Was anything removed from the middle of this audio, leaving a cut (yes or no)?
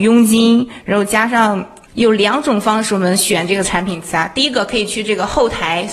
yes